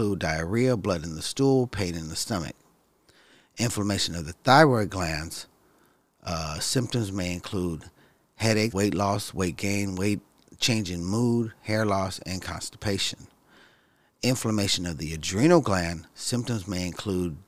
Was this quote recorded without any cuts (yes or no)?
no